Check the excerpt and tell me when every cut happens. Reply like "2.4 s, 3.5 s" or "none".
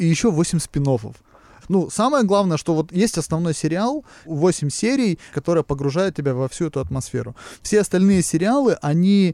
5.3 s